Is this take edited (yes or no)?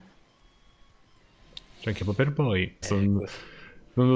yes